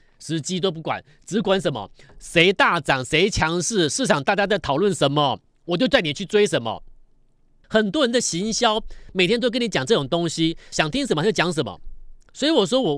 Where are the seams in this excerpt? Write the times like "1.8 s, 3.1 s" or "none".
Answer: 7.6 s, 10.7 s